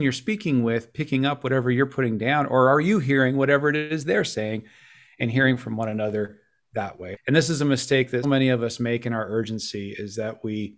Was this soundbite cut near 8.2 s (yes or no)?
yes